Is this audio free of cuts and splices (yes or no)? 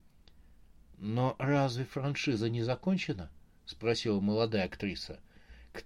yes